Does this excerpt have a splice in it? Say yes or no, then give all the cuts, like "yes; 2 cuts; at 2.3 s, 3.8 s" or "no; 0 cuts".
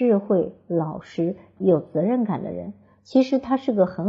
yes; 1 cut; at 1.6 s